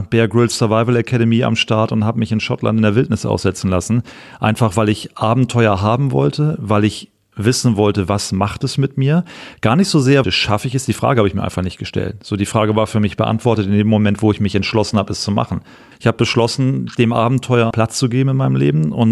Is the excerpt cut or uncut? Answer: cut